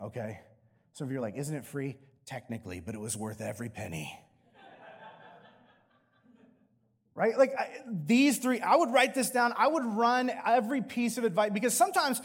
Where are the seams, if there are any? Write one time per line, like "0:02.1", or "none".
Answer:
none